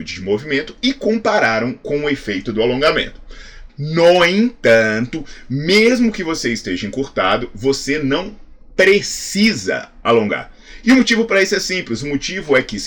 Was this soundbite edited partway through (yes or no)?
yes